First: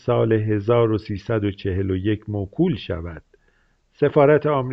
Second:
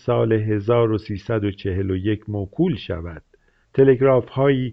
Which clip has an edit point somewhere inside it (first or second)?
second